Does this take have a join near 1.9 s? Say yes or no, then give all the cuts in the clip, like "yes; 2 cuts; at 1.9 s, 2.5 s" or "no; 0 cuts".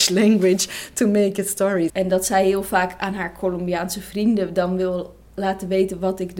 yes; 1 cut; at 1.9 s